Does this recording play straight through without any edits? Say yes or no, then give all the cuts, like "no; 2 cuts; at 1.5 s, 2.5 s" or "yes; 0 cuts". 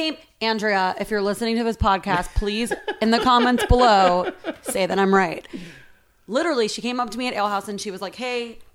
yes; 0 cuts